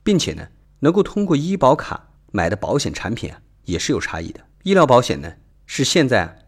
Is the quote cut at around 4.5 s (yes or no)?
yes